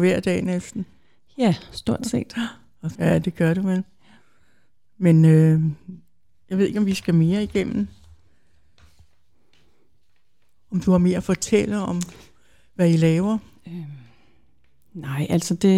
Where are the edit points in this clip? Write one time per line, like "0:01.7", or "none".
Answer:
0:03.0